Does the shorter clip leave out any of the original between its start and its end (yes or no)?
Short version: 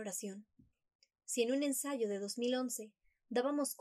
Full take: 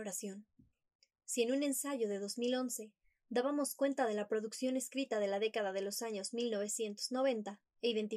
no